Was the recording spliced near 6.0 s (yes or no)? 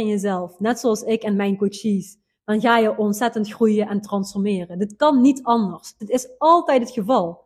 yes